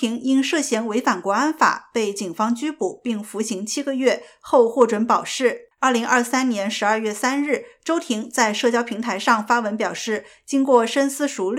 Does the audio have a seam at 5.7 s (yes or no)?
yes